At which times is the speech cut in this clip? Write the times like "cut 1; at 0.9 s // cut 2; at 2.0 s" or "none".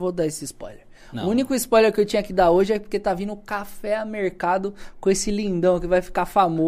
none